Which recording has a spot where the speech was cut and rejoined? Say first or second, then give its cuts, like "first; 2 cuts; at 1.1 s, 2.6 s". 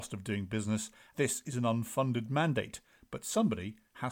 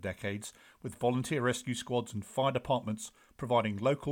first; 1 cut; at 1.1 s